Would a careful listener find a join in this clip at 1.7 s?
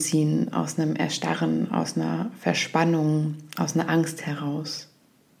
no; 0 cuts

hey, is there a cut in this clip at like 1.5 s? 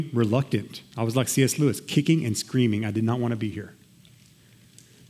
no; 0 cuts

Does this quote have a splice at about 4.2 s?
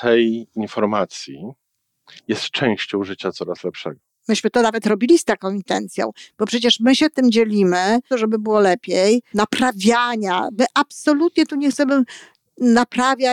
yes; 3 cuts; at 4.2 s, 8.1 s, 9.3 s

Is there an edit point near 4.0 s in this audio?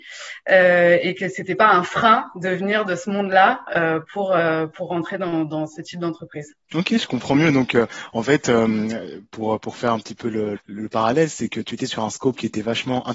no; 2 cuts; at 6.6 s, 10.6 s

